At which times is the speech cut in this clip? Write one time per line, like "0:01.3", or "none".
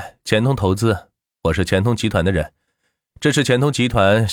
none